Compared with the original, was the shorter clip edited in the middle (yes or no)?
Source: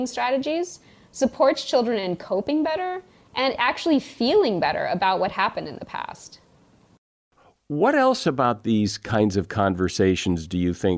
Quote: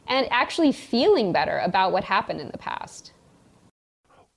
no